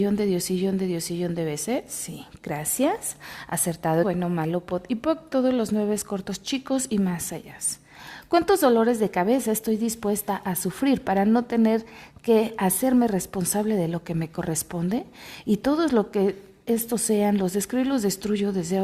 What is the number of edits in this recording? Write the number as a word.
one